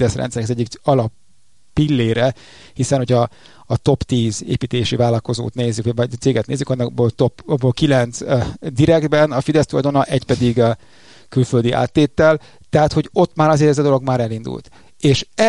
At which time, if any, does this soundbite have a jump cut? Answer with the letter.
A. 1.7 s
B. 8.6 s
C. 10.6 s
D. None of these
D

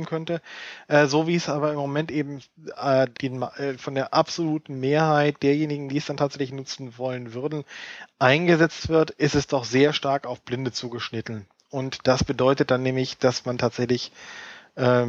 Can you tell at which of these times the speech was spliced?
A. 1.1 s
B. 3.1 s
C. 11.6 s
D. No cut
B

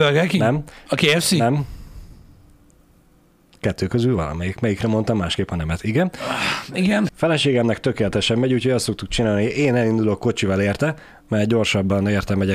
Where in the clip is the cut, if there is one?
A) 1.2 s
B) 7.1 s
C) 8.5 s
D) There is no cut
B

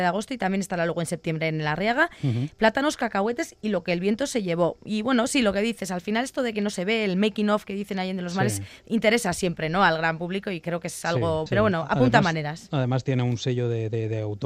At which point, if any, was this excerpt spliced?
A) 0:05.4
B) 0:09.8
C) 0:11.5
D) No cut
C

